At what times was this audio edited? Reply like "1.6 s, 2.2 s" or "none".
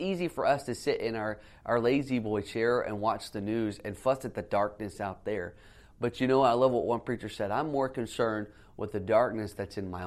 none